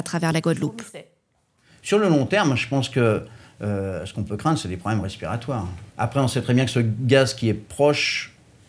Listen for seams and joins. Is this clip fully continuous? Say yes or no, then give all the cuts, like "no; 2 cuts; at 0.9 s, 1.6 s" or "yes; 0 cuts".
no; 1 cut; at 5.9 s